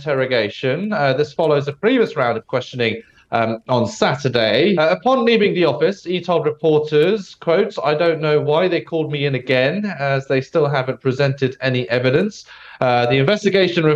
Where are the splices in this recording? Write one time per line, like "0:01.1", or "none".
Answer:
0:04.7